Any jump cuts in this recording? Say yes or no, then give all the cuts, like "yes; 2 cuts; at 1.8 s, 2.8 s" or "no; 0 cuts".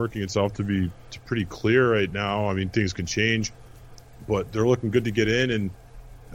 no; 0 cuts